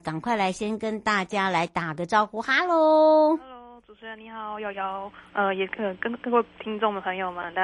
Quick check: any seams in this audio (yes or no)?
no